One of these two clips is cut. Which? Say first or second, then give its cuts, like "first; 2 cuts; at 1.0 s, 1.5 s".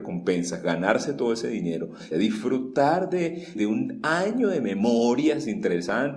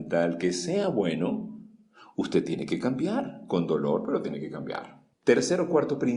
first; 2 cuts; at 2.1 s, 3.5 s